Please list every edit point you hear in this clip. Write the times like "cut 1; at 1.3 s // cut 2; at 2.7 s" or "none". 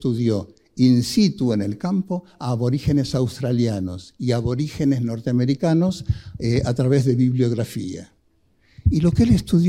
none